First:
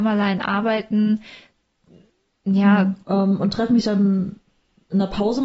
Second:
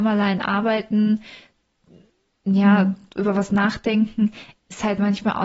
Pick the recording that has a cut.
first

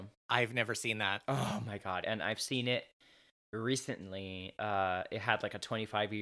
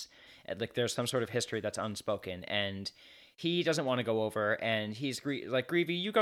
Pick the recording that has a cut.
first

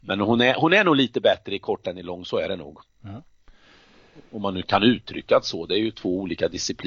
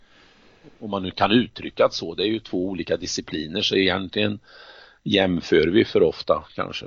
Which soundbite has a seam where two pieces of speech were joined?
first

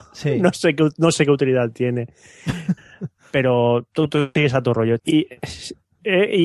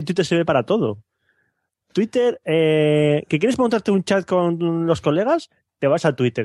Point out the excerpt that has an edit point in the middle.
first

